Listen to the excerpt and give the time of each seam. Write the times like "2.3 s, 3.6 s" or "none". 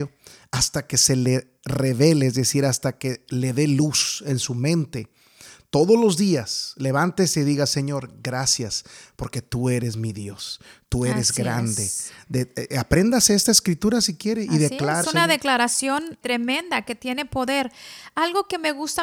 15.0 s, 16.2 s